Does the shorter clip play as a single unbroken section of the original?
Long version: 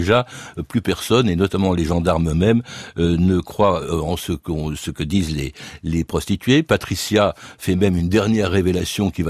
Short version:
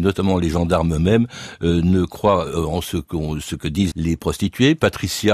no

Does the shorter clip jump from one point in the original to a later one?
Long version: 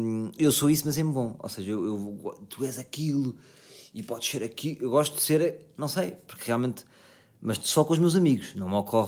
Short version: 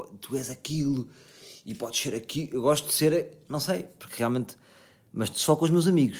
no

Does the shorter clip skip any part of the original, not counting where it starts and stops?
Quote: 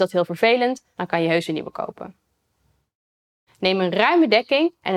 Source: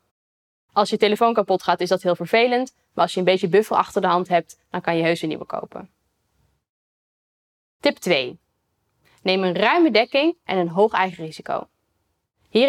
yes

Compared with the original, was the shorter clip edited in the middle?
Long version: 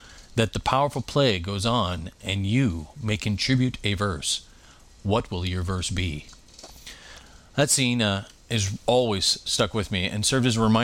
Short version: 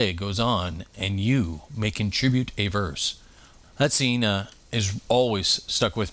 yes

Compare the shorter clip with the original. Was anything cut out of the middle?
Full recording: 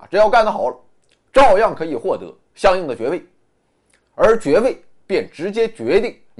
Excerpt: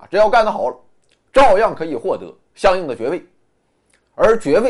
no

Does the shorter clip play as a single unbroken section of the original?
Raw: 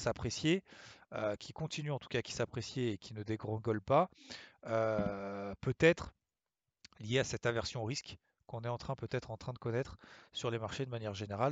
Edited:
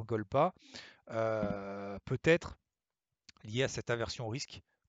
yes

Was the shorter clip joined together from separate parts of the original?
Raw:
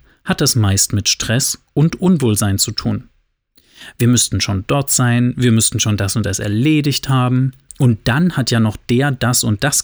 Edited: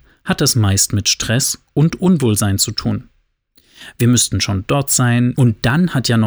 yes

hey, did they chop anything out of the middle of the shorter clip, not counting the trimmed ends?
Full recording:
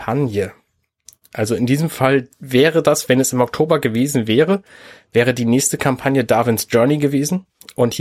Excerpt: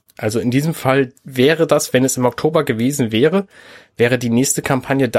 no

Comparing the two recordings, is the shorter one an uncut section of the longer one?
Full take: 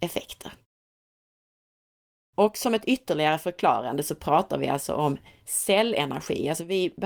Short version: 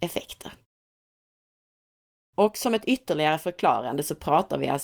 yes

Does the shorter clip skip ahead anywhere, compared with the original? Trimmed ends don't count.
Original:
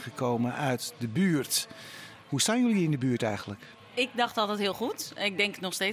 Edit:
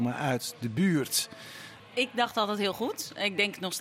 yes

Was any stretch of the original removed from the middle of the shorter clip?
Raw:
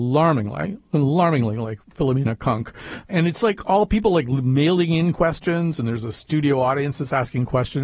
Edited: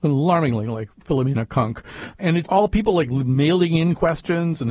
yes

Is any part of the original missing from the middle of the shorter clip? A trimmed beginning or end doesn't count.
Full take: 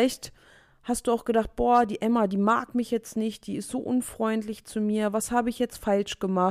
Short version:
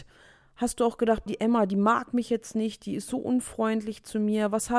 yes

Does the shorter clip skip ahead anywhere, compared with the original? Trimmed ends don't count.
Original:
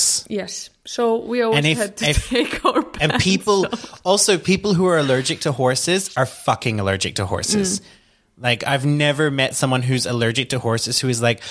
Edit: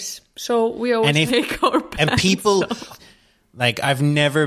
yes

